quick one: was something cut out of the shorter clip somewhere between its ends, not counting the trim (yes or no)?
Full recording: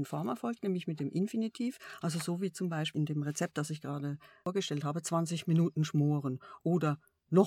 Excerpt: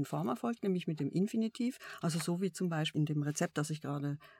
no